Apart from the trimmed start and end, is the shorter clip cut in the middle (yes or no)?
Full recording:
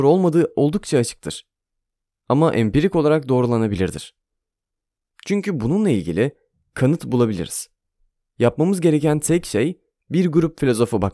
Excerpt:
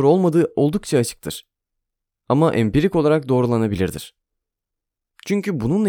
no